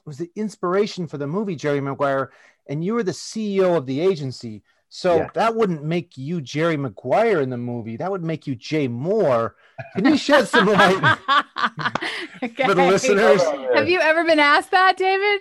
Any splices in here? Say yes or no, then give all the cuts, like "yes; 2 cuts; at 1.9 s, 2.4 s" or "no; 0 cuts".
no; 0 cuts